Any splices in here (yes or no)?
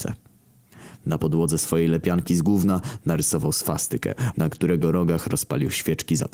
yes